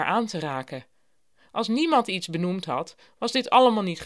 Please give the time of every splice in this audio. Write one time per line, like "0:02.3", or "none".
0:01.5